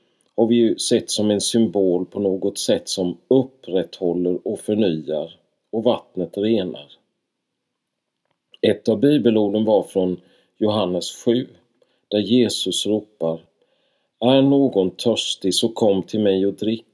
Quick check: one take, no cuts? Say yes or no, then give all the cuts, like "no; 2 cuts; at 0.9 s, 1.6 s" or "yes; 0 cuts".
yes; 0 cuts